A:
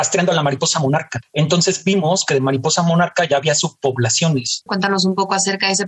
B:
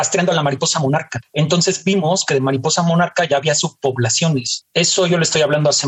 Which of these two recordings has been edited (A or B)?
A